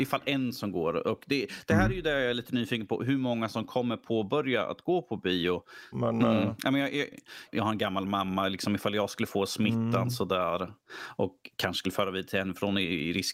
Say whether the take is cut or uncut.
cut